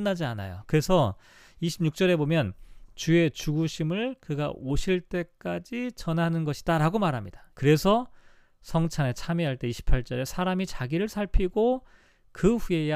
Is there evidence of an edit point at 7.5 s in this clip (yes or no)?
yes